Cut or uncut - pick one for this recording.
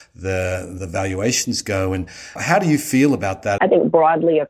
cut